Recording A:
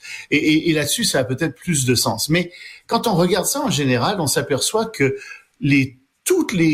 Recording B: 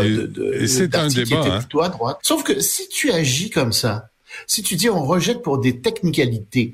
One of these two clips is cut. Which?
B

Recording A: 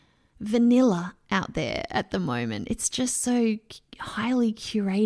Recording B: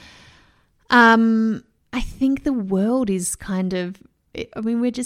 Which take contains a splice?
B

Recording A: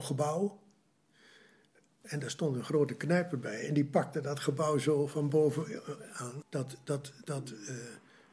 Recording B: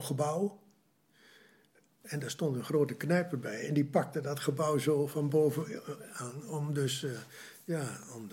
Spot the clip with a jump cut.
A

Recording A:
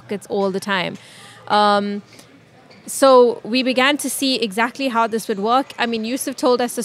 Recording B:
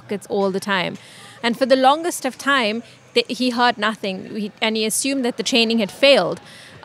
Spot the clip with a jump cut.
B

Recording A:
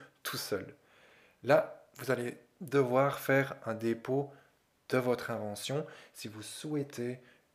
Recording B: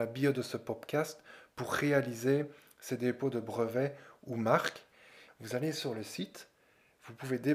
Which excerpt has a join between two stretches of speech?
B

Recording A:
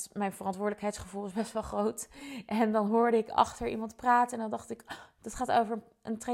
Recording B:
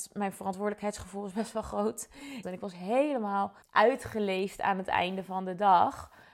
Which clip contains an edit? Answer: B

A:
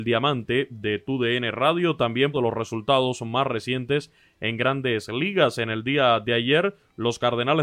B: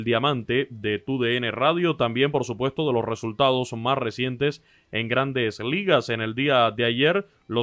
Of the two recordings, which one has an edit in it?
A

